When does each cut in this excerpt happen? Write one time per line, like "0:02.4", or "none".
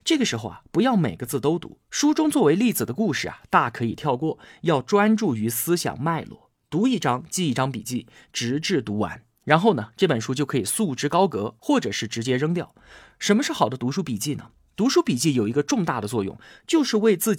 none